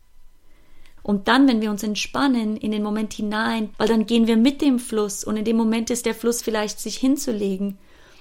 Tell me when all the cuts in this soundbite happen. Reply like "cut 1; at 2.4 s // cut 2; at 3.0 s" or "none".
cut 1; at 1.0 s // cut 2; at 3.7 s